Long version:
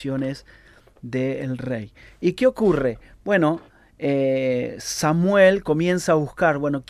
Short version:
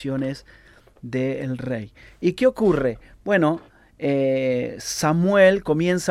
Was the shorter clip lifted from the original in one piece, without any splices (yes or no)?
yes